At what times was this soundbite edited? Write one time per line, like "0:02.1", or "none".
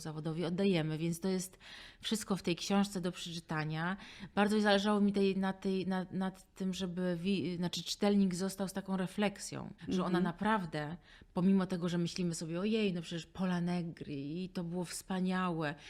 0:09.8